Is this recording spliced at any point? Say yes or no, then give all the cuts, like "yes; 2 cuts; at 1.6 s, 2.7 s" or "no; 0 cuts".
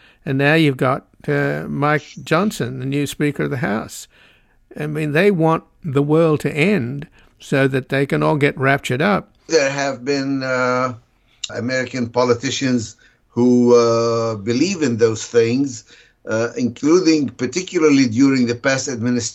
yes; 2 cuts; at 9.5 s, 11.5 s